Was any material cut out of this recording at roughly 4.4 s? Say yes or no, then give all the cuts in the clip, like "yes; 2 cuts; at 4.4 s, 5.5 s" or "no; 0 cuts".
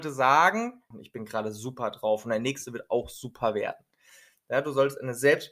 no; 1 cut; at 0.9 s